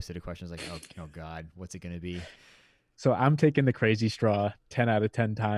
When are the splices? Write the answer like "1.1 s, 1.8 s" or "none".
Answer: 2.9 s